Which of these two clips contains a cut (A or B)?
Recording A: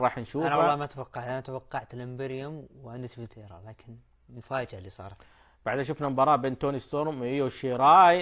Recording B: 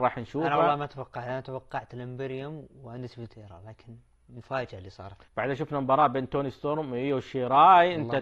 B